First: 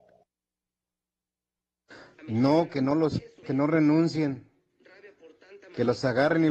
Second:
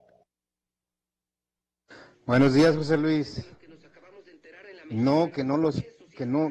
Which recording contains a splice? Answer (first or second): first